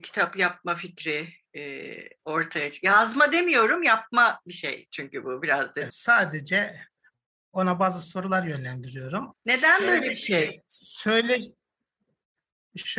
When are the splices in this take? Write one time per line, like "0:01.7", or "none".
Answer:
0:05.9
0:09.3